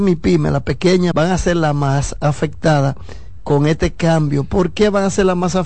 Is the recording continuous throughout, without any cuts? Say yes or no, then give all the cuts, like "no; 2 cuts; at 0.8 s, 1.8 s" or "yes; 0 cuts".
no; 1 cut; at 1.1 s